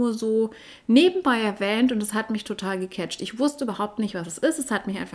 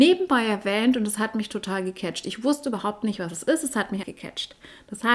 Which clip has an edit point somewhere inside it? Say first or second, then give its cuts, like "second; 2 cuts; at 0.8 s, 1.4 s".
second; 1 cut; at 4.0 s